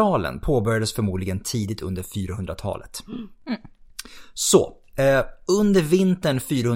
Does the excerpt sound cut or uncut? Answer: uncut